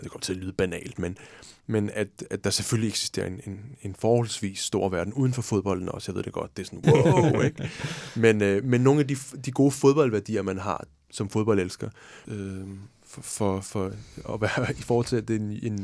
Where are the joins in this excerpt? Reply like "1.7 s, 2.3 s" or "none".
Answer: 6.8 s, 11.1 s, 12.2 s